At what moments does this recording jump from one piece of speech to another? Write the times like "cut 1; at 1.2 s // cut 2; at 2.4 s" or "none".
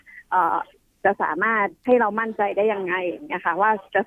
cut 1; at 1.8 s